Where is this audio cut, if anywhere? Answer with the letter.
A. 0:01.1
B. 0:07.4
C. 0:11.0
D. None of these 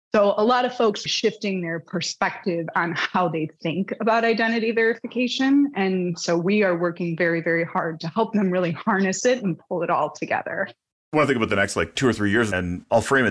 A